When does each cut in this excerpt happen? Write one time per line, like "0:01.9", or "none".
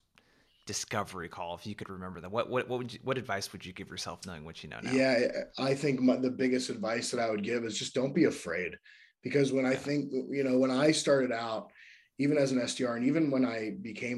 none